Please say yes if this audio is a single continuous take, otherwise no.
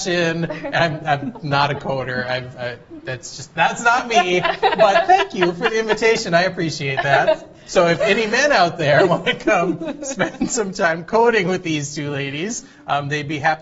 yes